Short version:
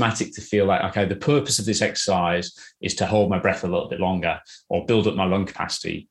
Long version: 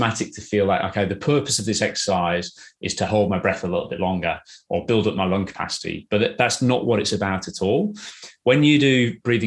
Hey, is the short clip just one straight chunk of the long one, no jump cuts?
yes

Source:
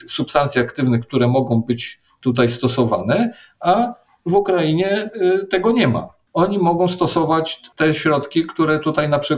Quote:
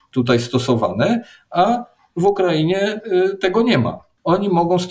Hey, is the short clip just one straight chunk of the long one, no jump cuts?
yes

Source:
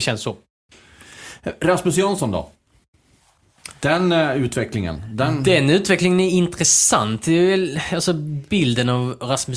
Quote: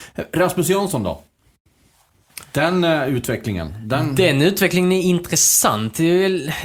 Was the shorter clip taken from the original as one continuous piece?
yes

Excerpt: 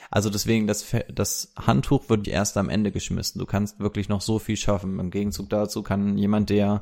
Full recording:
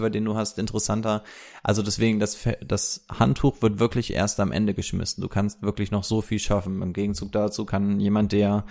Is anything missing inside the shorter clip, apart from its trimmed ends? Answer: yes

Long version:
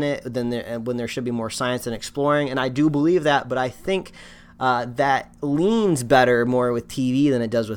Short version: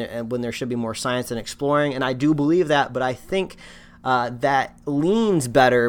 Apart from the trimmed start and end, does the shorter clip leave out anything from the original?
no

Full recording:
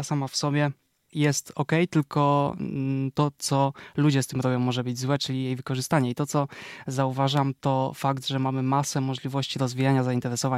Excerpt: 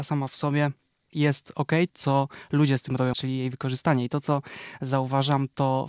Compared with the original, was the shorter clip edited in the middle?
yes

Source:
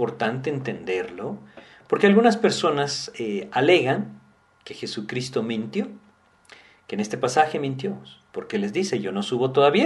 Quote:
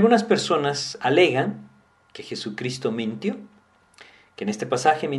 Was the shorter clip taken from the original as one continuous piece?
no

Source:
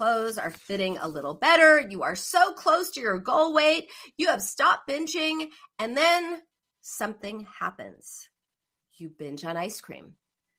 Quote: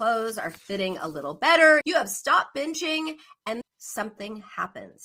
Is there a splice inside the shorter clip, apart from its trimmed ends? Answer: yes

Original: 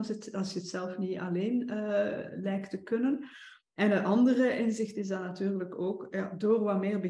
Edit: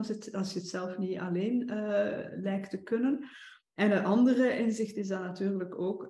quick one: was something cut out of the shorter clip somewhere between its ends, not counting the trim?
no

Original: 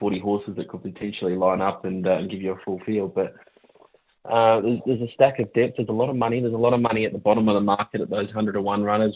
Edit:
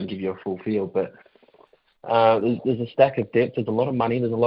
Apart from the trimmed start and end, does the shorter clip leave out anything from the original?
no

